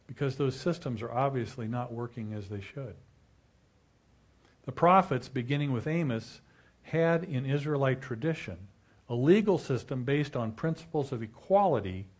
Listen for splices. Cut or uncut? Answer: uncut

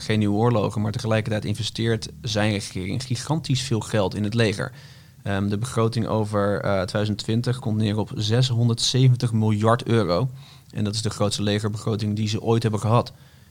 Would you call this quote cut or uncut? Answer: uncut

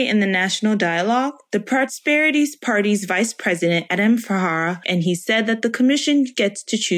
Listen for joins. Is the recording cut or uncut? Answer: cut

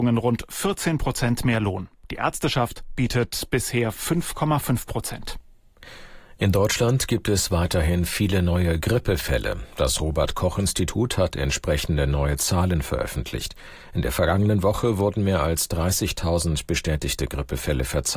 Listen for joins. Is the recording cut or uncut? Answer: uncut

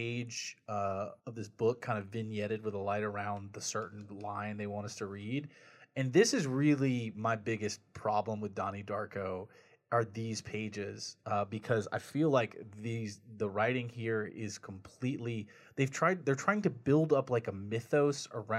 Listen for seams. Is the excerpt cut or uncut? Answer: cut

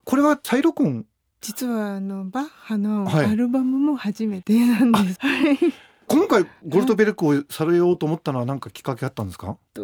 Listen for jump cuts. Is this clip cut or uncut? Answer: cut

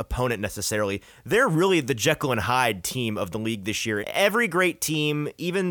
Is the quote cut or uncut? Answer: cut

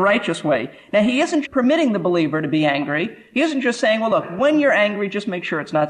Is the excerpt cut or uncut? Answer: cut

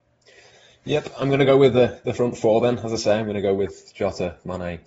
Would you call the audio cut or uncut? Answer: uncut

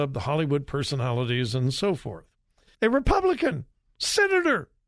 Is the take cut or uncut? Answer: cut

